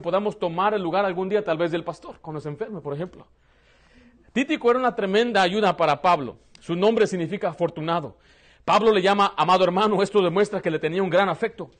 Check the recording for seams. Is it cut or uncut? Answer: uncut